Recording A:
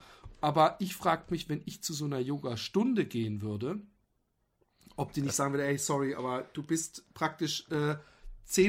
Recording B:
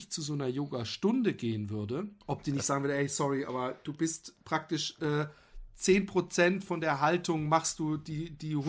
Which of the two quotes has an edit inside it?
B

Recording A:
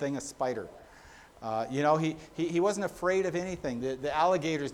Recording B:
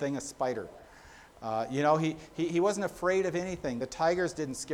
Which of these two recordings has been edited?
A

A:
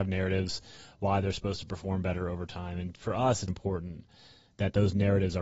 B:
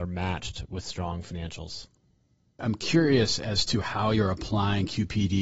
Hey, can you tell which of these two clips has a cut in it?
A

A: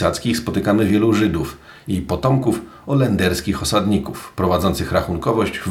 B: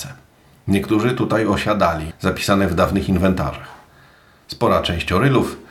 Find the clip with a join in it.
B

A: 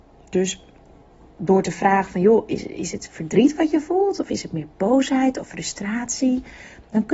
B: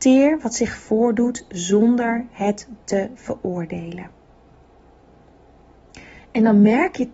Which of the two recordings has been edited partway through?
B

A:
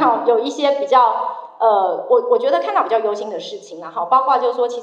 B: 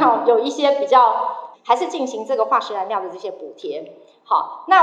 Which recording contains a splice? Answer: B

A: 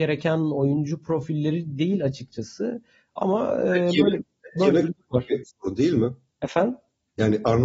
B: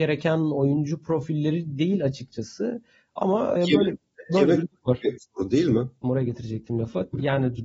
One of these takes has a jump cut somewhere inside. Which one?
B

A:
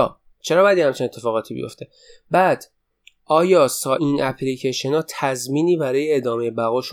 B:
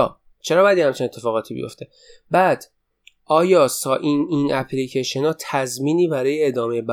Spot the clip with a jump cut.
A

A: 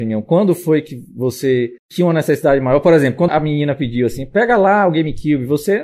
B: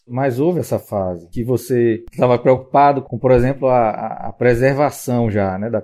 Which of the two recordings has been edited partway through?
A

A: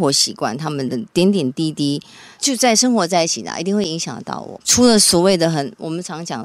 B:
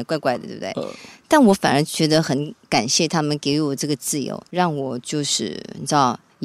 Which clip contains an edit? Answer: A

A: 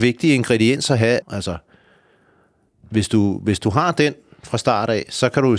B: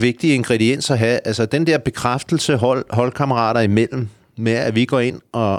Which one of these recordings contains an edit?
A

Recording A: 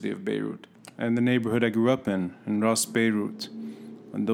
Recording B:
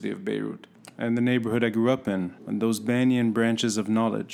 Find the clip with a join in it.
B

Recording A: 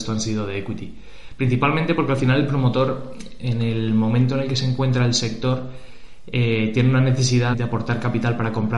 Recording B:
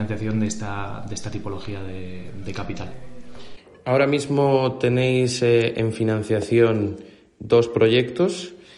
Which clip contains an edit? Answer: A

